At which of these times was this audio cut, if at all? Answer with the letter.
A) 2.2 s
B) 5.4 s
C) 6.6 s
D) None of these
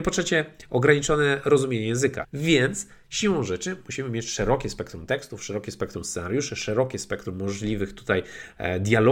A